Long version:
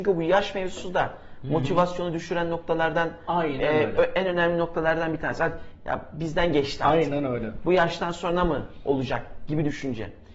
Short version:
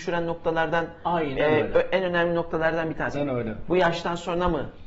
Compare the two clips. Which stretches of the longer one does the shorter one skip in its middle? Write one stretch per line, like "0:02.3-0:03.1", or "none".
0:05.4-0:07.1